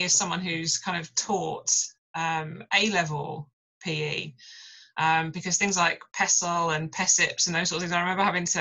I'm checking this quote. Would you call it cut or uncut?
uncut